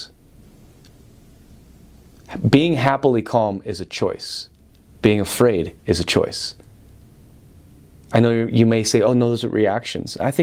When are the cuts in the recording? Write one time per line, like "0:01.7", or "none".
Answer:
none